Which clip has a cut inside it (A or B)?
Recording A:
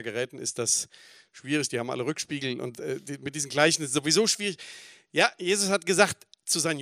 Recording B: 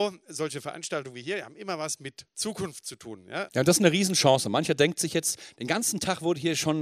B